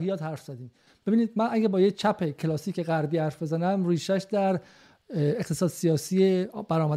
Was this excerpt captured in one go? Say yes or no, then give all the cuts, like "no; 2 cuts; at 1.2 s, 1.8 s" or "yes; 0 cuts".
yes; 0 cuts